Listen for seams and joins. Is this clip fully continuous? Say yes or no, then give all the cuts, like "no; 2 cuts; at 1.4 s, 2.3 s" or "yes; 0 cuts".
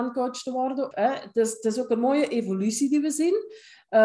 no; 1 cut; at 0.9 s